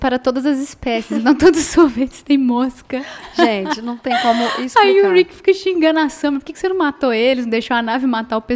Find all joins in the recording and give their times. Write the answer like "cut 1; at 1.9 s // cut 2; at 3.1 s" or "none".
none